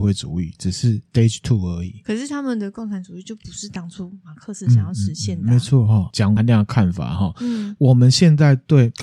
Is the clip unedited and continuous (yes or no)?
no